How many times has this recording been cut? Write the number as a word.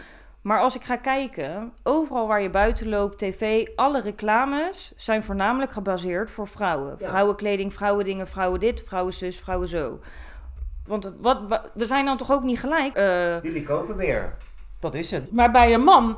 three